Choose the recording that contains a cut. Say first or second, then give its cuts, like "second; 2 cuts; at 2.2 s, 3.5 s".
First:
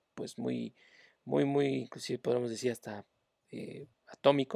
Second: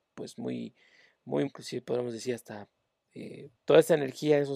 second; 2 cuts; at 1.5 s, 3.6 s